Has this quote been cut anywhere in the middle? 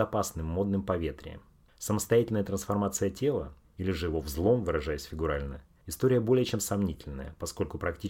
no; 0 cuts

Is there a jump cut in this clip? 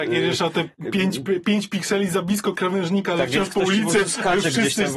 no; 0 cuts

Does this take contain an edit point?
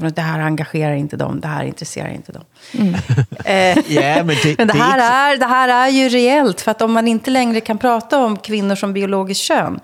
yes; 1 cut; at 3.7 s

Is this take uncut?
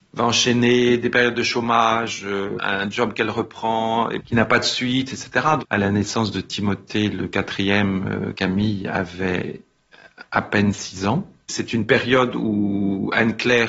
no; 2 cuts; at 5.6 s, 11.4 s

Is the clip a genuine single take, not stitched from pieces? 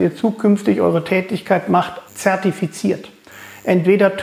no; 1 cut; at 2.1 s

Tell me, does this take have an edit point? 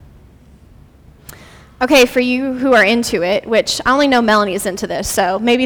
no; 0 cuts

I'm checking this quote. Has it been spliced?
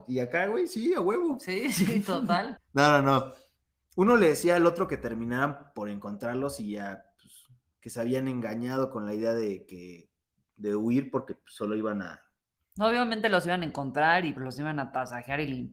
yes; 1 cut; at 14.4 s

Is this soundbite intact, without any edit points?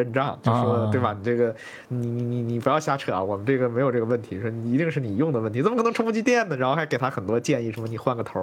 yes; 0 cuts

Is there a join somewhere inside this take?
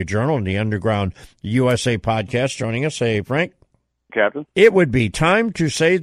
yes; 1 cut; at 4.1 s

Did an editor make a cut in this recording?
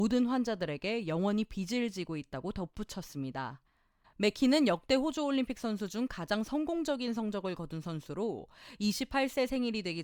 yes; 1 cut; at 4.0 s

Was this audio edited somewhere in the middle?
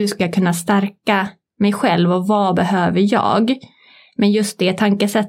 no; 0 cuts

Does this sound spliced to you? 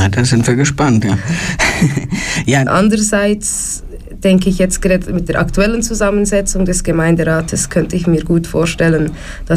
yes; 1 cut; at 2.7 s

